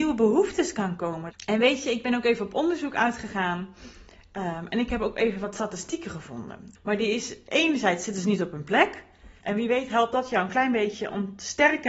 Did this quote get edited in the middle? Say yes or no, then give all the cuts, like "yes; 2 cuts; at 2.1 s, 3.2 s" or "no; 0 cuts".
yes; 3 cuts; at 1.3 s, 6.7 s, 9.4 s